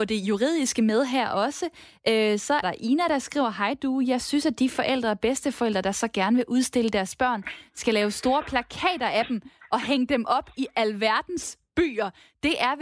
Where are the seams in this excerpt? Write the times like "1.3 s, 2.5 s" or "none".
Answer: 2.6 s